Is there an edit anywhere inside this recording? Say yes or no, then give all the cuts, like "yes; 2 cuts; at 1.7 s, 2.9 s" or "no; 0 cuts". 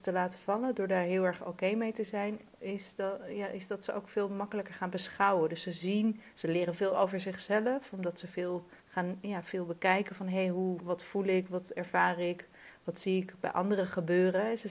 yes; 2 cuts; at 8.8 s, 10.8 s